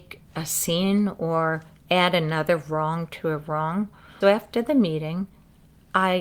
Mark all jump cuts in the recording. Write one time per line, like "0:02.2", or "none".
0:04.2